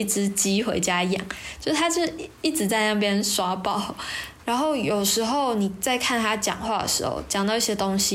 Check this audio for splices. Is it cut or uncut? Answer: cut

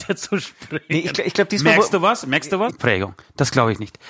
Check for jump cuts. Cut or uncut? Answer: cut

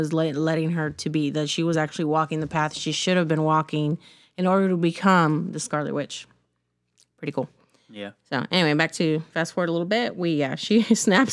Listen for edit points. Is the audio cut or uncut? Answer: uncut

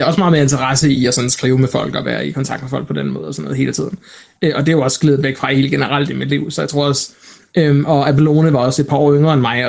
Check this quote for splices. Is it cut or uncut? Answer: uncut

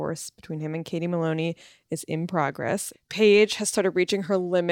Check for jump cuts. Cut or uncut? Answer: cut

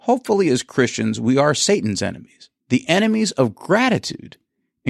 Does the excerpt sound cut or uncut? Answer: cut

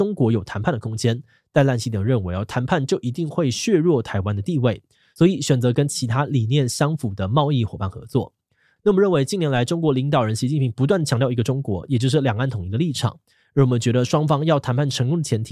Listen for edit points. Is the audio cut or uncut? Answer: uncut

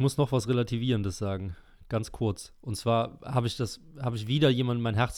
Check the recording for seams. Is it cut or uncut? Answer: uncut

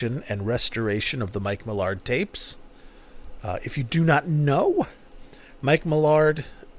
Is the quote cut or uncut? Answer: uncut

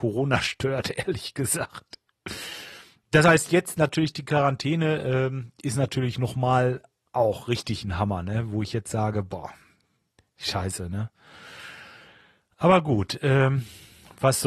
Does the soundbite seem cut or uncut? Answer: uncut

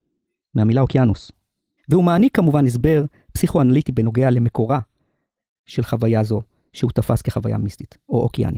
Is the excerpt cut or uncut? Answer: cut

